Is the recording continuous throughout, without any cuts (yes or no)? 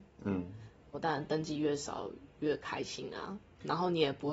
no